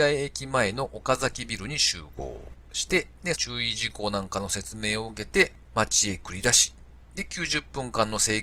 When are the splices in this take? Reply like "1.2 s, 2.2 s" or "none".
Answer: 3.3 s